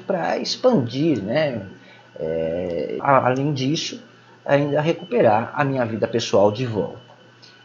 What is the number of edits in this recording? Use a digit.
1